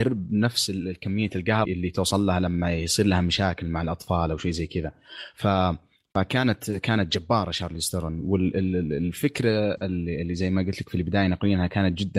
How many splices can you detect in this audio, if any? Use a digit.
1